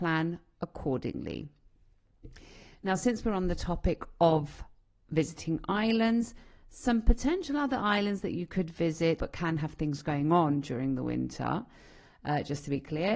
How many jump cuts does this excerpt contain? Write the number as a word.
one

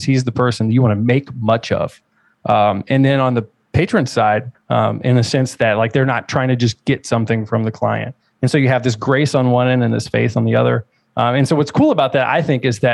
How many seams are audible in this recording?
one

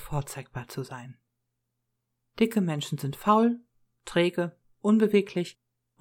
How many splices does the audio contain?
one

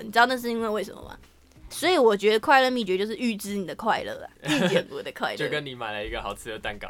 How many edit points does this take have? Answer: one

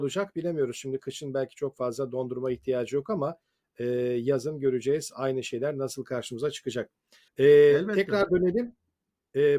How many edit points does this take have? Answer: one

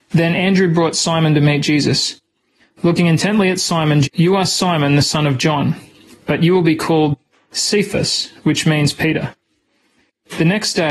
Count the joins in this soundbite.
one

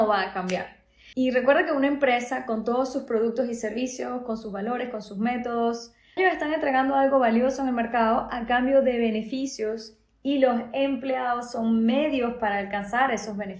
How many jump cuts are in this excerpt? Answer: two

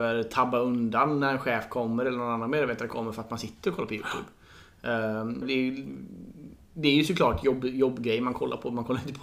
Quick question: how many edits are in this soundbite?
one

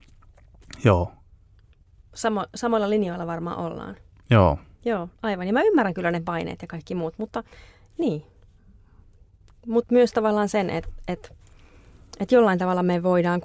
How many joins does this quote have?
zero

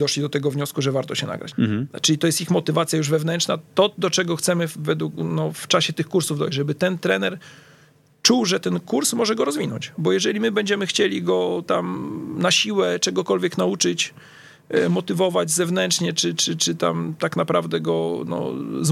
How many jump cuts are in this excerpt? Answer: one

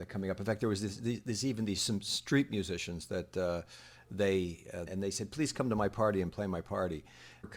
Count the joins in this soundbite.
one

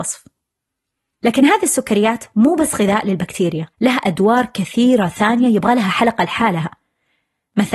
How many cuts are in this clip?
one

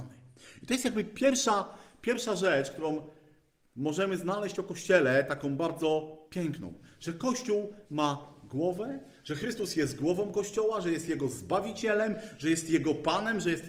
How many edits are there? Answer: zero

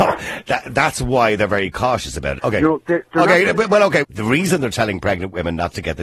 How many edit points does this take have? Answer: two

